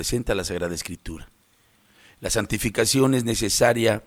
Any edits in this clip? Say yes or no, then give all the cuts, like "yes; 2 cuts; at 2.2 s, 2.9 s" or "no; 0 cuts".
no; 0 cuts